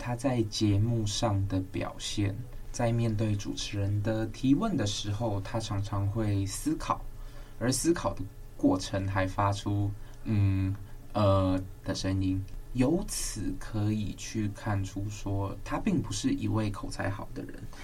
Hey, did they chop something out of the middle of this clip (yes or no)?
no